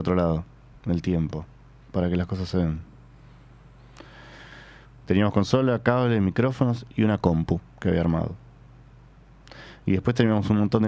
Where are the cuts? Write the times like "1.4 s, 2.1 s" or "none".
5.0 s